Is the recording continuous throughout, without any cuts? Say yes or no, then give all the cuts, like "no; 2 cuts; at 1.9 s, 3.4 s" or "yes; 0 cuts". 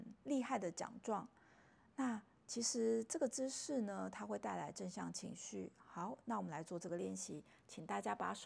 yes; 0 cuts